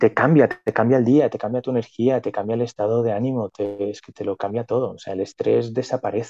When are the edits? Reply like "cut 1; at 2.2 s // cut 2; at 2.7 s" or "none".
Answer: none

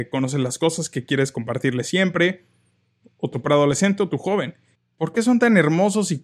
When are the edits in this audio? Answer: cut 1; at 3.0 s // cut 2; at 4.7 s

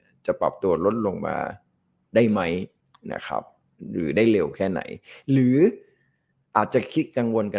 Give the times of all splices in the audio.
none

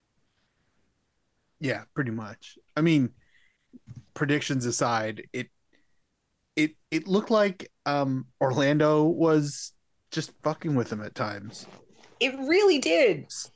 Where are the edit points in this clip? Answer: cut 1; at 4.1 s // cut 2; at 6.8 s

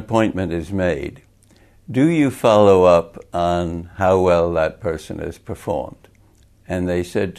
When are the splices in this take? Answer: none

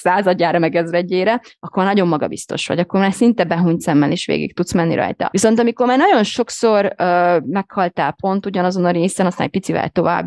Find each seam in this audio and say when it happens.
cut 1; at 5.3 s

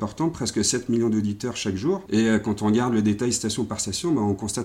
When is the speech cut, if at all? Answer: cut 1; at 2.1 s

